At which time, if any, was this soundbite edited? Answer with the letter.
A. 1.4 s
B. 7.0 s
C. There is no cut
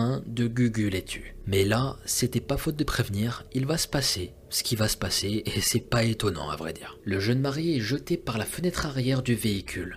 B